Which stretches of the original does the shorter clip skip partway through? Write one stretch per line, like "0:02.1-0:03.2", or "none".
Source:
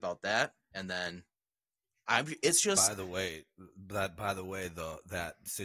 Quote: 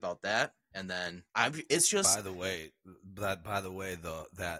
0:01.3-0:02.0